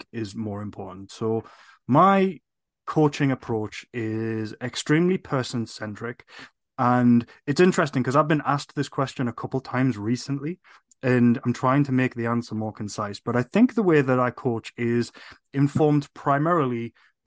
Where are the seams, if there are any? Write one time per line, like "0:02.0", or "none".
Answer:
none

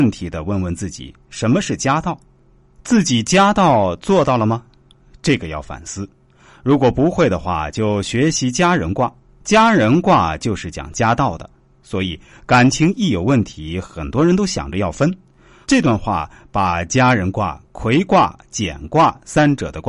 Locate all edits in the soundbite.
0:15.6

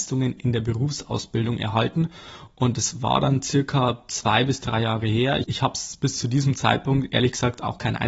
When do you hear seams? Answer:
none

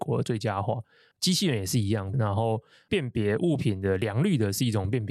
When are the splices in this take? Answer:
0:02.1

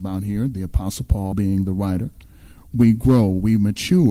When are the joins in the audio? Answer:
0:01.3

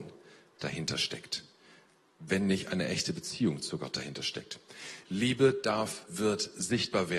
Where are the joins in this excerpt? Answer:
0:05.0
0:06.1

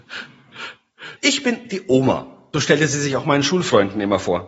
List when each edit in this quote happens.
0:01.2
0:02.5

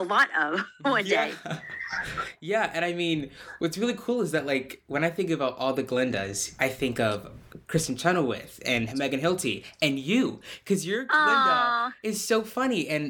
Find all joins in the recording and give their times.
0:06.6

